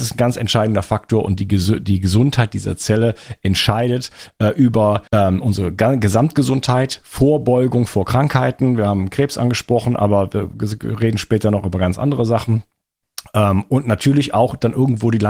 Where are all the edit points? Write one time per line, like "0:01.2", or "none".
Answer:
0:05.1